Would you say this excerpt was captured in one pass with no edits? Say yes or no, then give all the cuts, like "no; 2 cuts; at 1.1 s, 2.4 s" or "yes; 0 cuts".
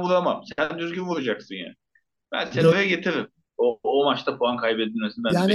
no; 1 cut; at 3.6 s